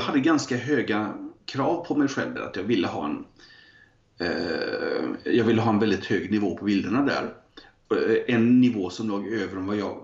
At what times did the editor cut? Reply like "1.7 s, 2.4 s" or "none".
none